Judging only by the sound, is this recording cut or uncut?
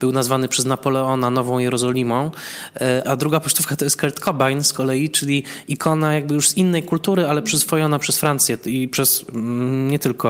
cut